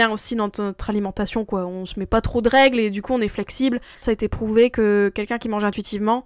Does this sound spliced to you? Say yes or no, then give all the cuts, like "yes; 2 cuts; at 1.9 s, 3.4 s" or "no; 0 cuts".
yes; 1 cut; at 3.9 s